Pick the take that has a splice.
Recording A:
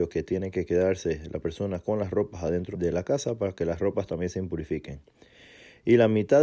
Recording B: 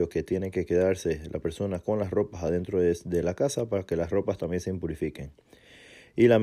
A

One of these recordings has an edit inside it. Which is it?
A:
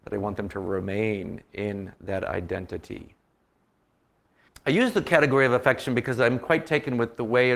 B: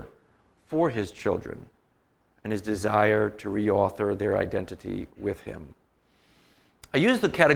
A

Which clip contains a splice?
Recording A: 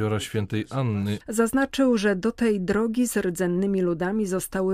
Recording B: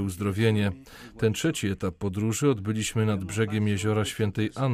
A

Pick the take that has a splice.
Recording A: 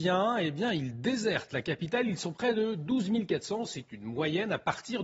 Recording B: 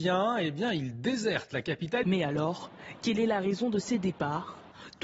B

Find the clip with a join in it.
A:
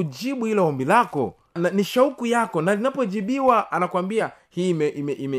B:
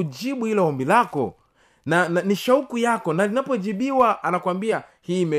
A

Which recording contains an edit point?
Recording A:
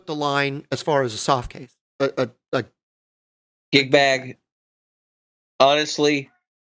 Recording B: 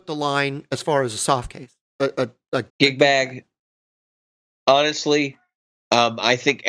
B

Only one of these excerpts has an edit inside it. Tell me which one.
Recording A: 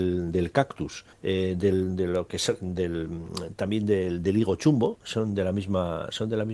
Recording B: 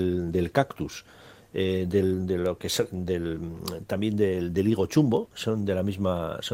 A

